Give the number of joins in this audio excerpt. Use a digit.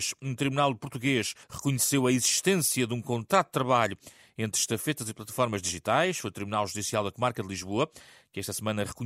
1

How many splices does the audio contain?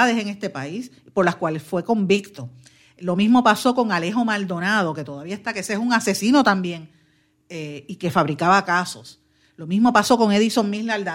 0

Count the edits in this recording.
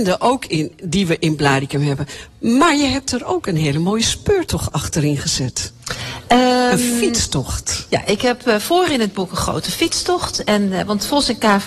0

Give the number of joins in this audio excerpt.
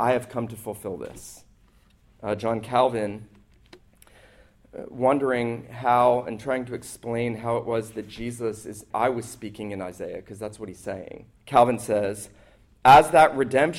2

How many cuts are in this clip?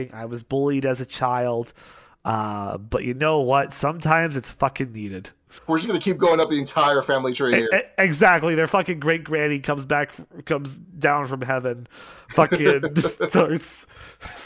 1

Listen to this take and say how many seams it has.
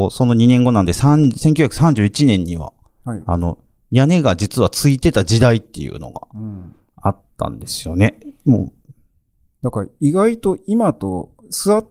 0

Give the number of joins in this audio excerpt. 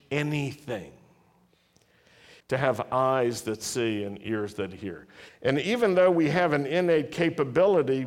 2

